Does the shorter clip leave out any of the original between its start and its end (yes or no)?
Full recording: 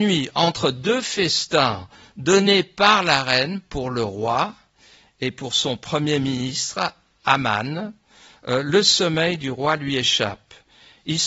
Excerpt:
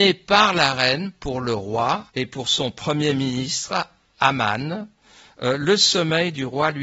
yes